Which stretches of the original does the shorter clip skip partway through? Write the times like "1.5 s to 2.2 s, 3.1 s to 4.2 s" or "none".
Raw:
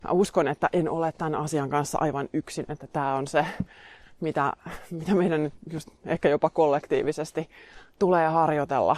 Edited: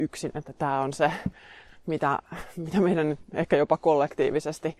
5.6 s to 6.0 s